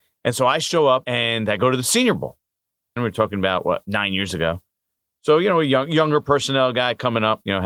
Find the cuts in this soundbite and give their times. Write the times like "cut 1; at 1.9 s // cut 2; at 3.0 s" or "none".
cut 1; at 3.0 s